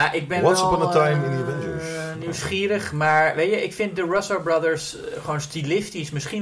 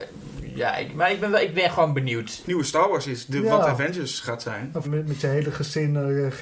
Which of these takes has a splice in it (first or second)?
second